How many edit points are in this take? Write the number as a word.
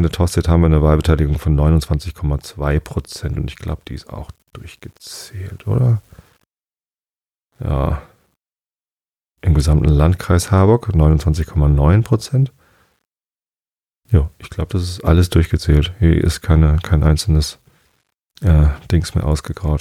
zero